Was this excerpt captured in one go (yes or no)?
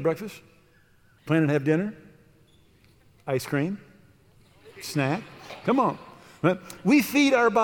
no